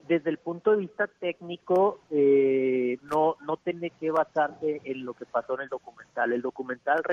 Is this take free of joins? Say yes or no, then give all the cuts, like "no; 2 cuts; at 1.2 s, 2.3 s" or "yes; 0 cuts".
no; 1 cut; at 3.0 s